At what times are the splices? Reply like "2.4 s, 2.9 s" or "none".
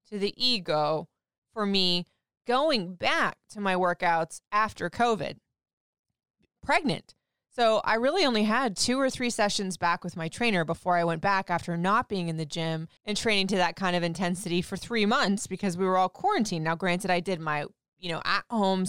13.0 s